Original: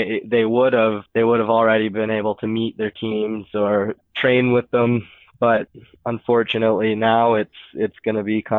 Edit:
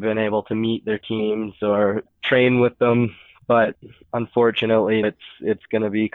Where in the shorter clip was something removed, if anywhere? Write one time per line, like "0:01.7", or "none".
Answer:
0:05.0